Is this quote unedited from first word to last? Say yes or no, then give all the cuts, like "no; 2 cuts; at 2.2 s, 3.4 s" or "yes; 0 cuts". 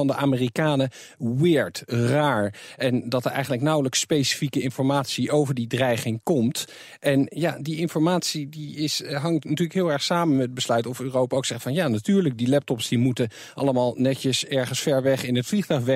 yes; 0 cuts